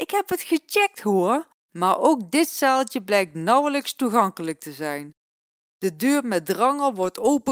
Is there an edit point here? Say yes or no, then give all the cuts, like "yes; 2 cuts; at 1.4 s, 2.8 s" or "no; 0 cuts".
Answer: yes; 1 cut; at 1.6 s